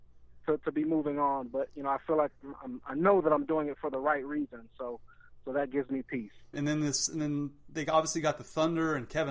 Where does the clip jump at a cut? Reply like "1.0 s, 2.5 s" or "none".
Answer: 6.5 s